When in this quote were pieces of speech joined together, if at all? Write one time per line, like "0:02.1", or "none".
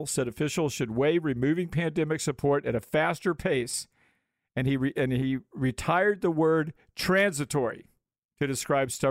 none